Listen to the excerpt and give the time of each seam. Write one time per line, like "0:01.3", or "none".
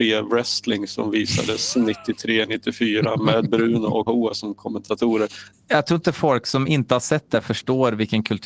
0:04.1
0:05.5